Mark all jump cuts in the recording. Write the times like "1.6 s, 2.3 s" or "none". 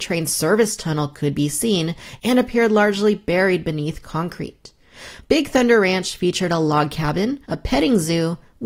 5.2 s, 7.4 s

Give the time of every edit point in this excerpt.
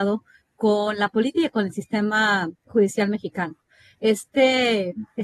none

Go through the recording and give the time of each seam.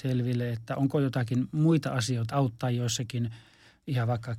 2.3 s

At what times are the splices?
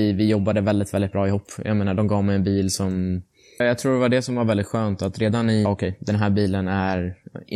3.6 s, 5.7 s

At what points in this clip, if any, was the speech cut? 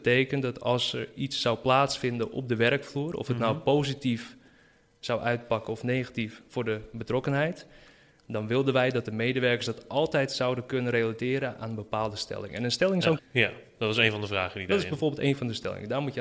13.2 s

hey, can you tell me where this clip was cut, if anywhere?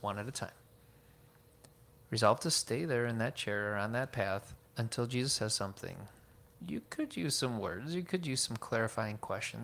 4.7 s, 6.6 s

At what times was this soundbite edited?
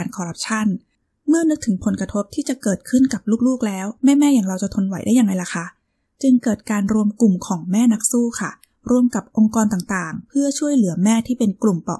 4.0 s

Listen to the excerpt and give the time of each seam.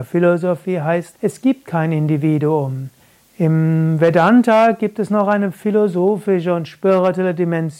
1.1 s, 3.2 s

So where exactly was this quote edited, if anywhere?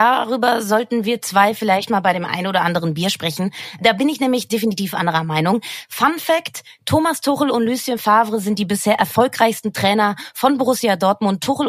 none

